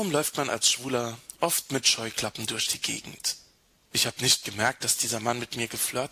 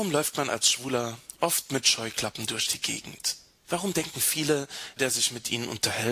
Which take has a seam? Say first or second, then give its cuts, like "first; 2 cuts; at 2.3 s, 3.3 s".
second; 2 cuts; at 3.6 s, 5.0 s